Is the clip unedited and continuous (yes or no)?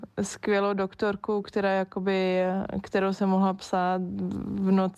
yes